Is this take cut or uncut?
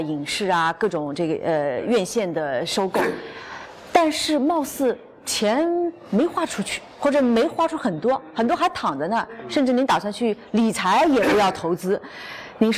uncut